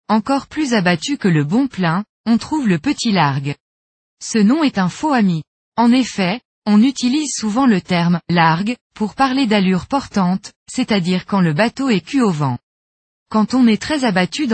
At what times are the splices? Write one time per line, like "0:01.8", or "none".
0:13.1